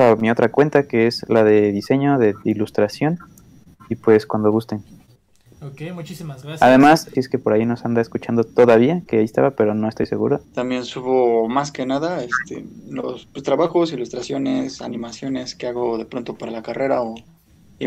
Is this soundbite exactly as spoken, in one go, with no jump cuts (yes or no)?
no